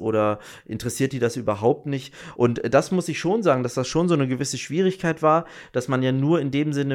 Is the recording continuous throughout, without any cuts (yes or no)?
yes